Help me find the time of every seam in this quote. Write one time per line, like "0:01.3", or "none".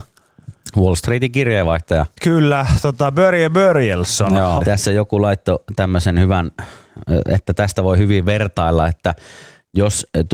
0:04.6

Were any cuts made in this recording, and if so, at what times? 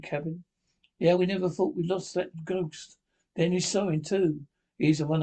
0:01.2

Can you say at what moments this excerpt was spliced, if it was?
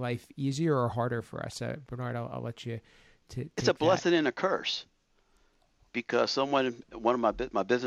none

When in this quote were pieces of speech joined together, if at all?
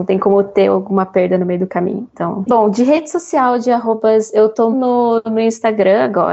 0:02.5
0:04.7

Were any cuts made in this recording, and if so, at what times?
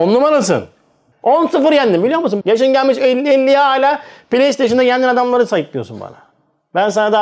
0:01.1
0:02.4

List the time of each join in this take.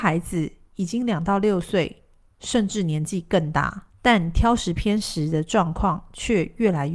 0:03.9

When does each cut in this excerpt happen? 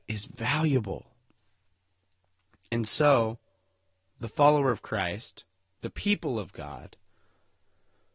none

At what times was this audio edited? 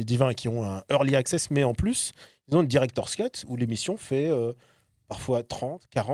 none

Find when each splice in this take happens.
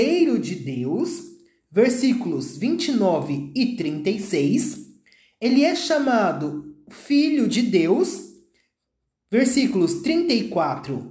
none

